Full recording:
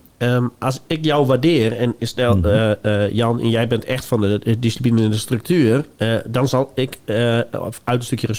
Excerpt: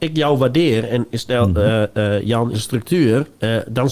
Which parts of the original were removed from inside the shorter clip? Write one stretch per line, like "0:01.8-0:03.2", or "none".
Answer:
0:03.4-0:05.1